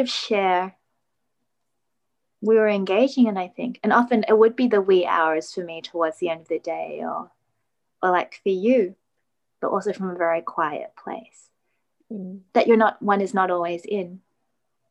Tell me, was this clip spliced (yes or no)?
yes